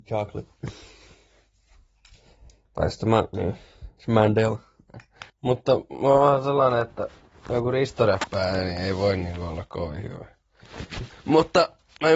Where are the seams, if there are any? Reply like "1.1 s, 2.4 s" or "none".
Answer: 5.3 s, 11.1 s